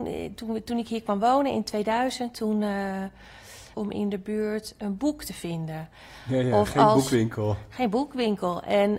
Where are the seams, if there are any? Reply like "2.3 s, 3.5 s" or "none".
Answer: 3.7 s